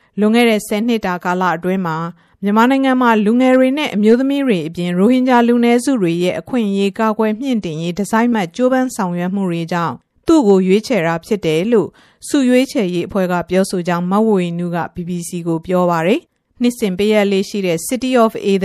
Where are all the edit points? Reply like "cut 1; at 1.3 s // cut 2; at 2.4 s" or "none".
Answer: cut 1; at 8.3 s